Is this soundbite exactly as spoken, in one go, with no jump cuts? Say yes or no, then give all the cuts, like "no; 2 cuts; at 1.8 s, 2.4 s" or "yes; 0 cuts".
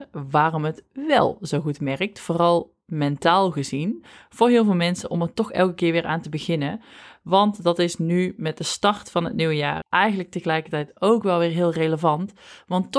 no; 1 cut; at 9.8 s